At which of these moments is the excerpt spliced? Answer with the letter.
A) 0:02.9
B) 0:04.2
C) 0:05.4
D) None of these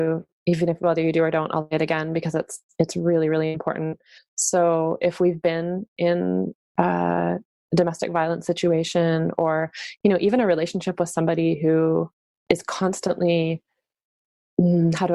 B